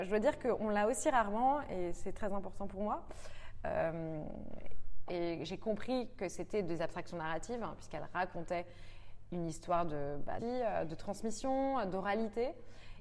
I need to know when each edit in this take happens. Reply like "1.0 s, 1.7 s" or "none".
5.1 s, 10.4 s